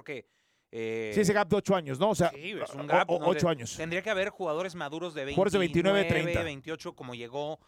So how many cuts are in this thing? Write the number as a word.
zero